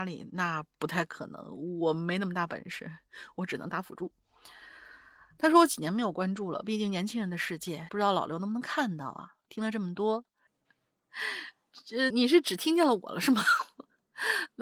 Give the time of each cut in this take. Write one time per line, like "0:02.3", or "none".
0:07.9
0:10.5
0:12.1